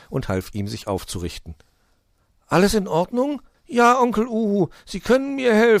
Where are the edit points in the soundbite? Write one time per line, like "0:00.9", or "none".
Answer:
0:03.5